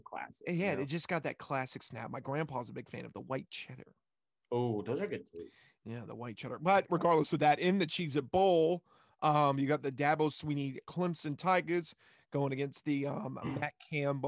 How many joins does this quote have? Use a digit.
0